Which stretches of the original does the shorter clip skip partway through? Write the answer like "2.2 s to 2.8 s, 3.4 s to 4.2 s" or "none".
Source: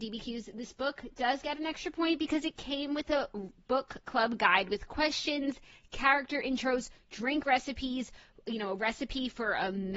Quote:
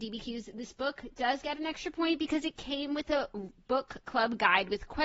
none